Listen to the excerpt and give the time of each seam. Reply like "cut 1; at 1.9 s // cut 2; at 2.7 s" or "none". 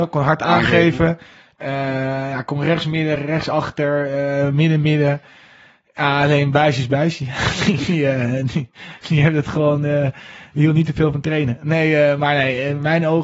cut 1; at 3.2 s